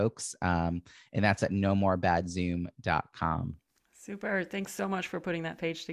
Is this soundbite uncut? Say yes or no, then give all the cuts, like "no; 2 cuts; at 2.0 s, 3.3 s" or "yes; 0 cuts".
yes; 0 cuts